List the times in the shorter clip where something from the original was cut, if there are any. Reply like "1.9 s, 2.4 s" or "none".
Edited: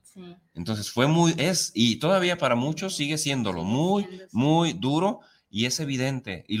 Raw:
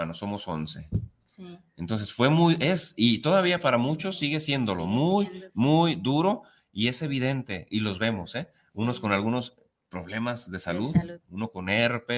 none